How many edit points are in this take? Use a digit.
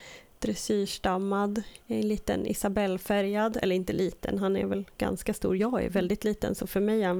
0